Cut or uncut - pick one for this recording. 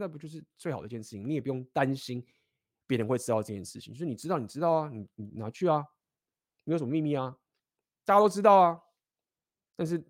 uncut